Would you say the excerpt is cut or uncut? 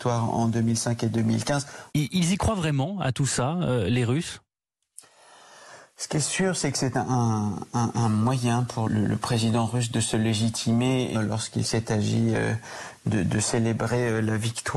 cut